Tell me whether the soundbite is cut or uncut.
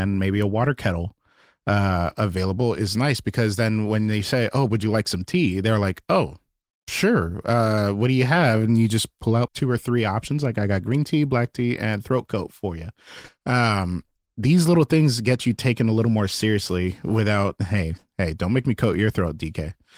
cut